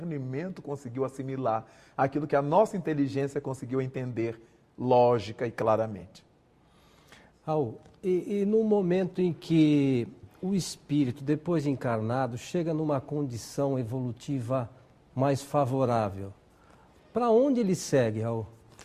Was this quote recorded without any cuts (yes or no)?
yes